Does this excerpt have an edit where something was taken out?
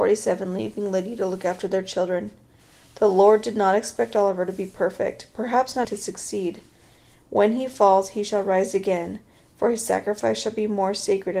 yes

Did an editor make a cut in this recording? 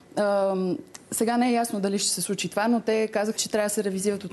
yes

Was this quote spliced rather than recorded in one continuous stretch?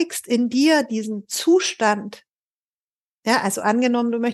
no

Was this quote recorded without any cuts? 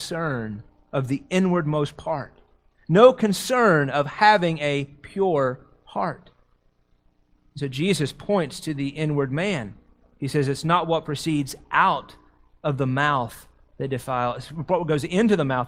yes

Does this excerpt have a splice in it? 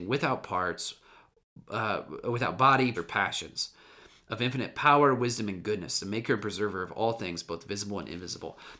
yes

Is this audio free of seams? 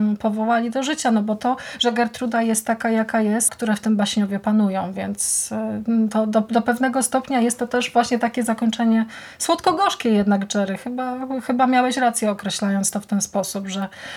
no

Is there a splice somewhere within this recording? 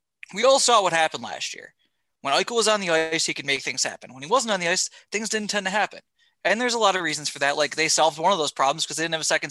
no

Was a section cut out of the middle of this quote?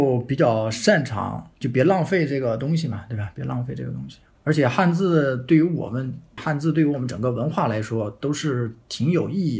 yes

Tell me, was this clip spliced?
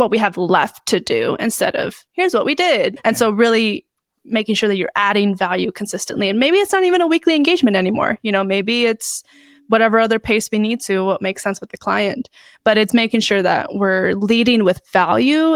no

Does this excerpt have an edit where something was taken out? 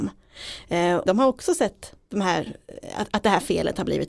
yes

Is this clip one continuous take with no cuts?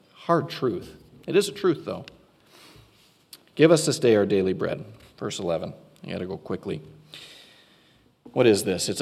yes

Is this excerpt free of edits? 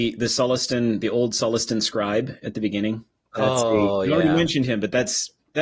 yes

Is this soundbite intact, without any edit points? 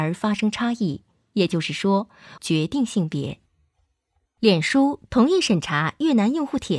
no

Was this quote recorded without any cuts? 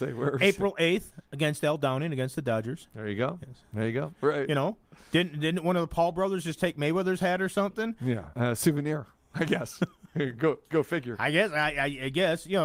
no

